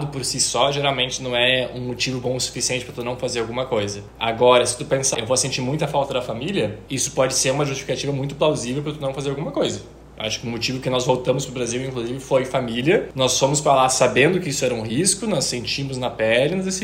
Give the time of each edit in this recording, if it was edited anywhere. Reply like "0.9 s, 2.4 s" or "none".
5.1 s